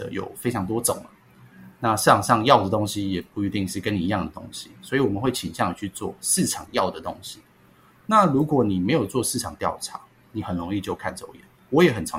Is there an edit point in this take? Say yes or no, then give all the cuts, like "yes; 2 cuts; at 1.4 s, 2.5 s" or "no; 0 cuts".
no; 0 cuts